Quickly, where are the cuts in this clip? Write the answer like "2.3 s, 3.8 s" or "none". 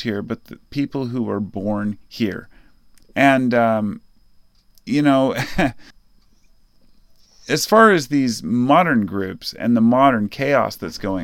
3.0 s, 5.9 s